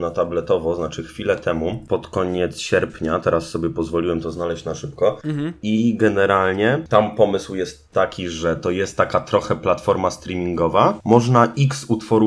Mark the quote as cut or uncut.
cut